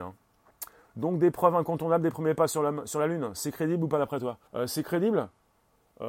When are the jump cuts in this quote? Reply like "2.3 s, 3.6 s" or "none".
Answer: 4.5 s